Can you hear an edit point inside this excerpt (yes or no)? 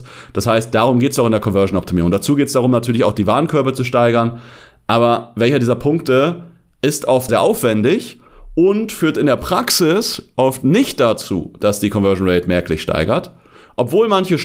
yes